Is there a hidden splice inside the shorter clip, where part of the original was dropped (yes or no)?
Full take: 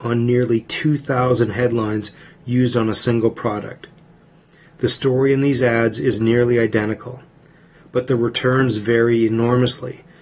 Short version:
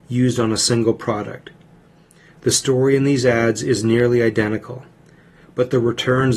no